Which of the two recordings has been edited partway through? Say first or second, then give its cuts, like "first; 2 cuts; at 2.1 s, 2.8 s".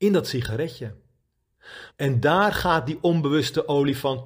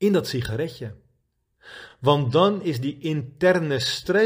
first; 1 cut; at 1.9 s